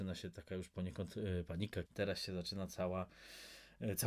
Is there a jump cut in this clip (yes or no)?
yes